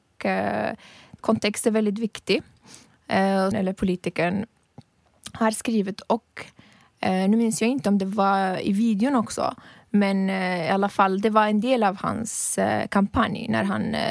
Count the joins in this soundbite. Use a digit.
1